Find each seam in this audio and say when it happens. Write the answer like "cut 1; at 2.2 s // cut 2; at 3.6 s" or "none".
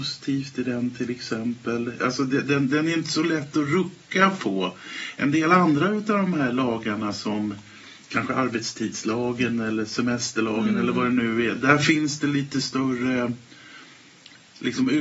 none